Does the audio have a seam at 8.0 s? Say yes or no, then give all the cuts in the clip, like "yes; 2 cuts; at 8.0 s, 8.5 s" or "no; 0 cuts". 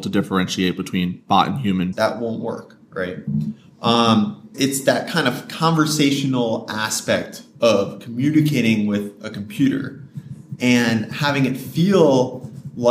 no; 2 cuts; at 1.9 s, 4.5 s